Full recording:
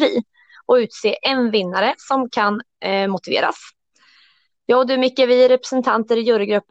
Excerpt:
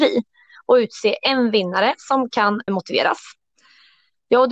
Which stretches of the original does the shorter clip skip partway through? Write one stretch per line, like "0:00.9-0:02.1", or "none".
0:02.7-0:03.1